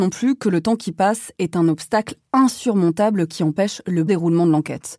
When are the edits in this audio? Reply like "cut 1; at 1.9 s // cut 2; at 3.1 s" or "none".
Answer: cut 1; at 4.1 s